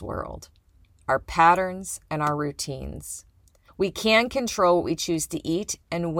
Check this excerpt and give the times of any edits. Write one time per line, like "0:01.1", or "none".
0:01.0
0:03.7

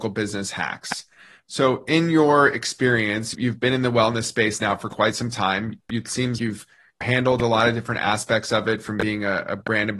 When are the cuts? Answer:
0:06.4

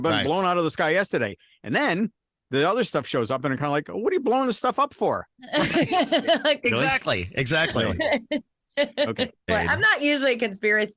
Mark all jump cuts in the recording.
0:09.5

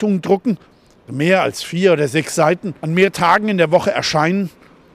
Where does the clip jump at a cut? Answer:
0:01.1
0:02.8

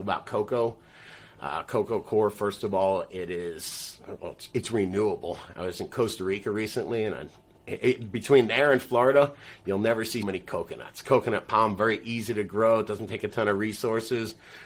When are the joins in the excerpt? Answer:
0:10.2

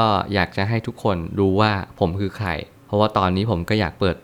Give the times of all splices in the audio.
none

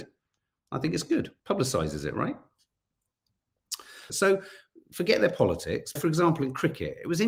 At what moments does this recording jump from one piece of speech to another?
0:01.4
0:04.1
0:06.0

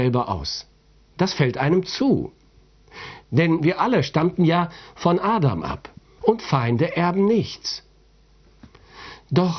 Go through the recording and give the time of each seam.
0:03.2
0:06.2

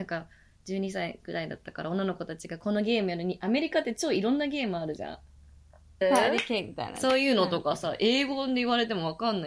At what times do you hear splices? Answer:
0:06.0

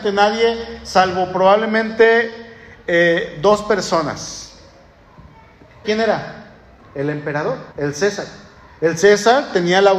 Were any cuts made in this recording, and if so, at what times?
0:05.8
0:07.7

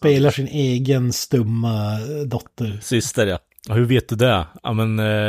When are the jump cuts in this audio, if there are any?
0:03.5

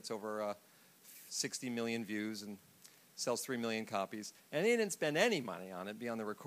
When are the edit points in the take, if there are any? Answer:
0:04.4

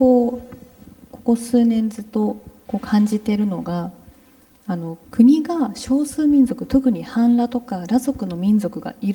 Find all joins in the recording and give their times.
0:05.0

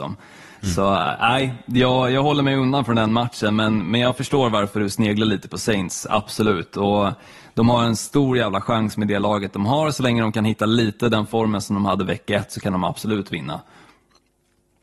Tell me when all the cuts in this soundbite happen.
none

